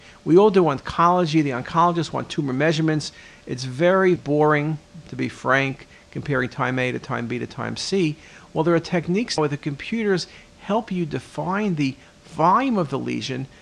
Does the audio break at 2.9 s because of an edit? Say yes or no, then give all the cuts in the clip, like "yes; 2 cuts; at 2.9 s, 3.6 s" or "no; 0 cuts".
no; 2 cuts; at 4.2 s, 9.4 s